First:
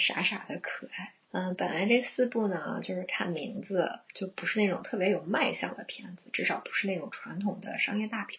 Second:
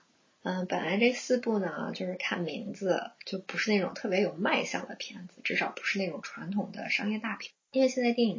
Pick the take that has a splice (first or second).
first